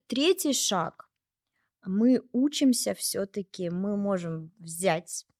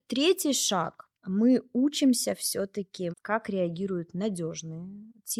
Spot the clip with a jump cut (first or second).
second